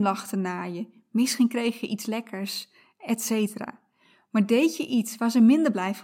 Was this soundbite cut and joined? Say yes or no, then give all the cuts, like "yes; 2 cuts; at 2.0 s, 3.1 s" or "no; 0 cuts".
no; 0 cuts